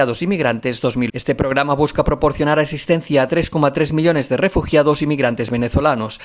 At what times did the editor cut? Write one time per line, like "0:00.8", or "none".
0:01.1